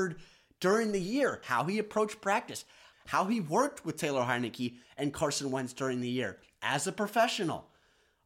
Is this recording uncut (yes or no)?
no